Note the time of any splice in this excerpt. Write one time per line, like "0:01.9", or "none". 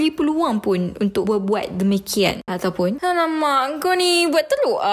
0:02.5